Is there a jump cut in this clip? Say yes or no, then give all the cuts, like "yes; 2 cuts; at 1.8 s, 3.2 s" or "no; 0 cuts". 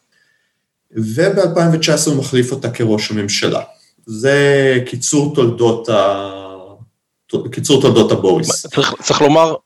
no; 0 cuts